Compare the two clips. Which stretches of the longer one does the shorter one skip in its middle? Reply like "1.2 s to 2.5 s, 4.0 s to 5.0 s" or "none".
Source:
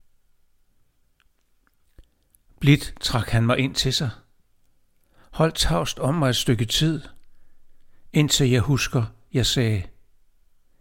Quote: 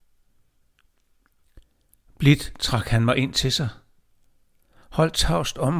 none